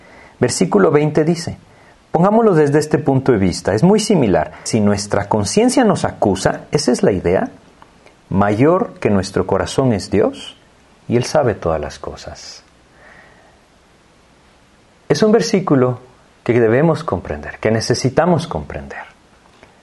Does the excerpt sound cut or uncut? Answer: cut